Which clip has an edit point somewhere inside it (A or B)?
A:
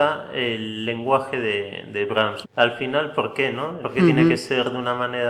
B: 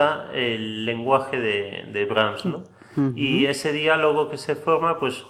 A